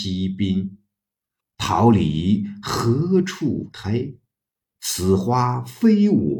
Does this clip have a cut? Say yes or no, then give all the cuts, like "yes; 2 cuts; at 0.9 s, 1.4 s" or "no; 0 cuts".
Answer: yes; 1 cut; at 1.4 s